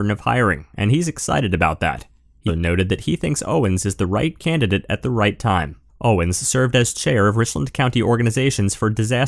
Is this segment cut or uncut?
cut